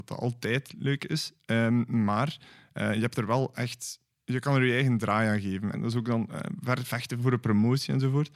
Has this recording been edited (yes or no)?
yes